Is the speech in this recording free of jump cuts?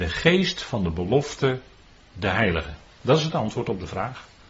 yes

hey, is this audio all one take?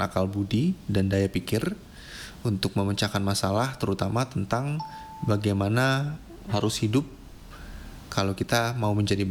no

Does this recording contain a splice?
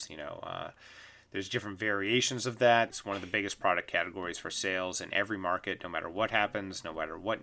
yes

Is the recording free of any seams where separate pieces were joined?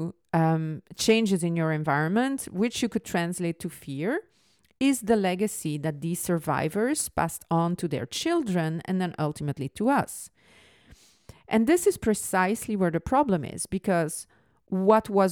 yes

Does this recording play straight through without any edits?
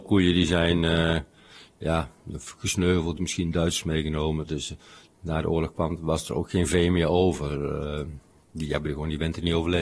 no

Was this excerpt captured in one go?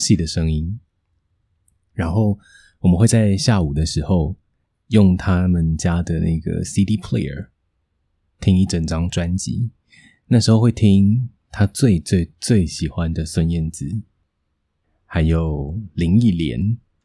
yes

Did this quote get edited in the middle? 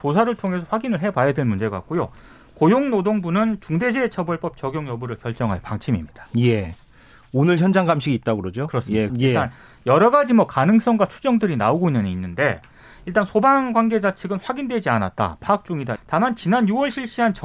yes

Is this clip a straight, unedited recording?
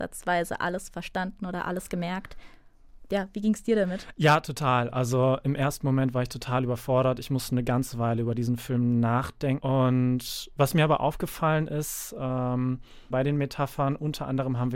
no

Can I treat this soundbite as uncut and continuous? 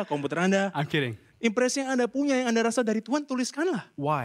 no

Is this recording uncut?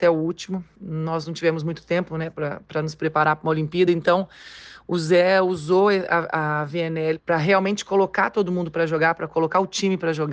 yes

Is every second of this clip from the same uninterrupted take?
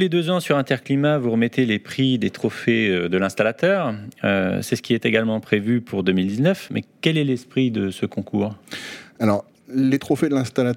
yes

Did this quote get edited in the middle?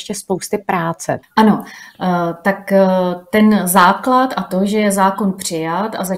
yes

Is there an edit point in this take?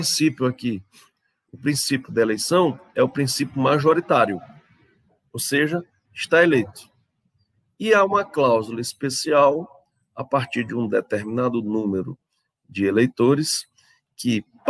yes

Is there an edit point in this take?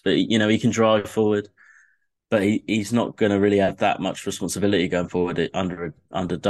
no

